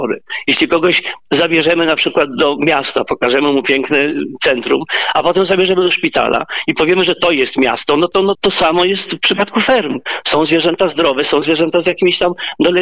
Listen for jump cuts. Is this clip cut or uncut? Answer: cut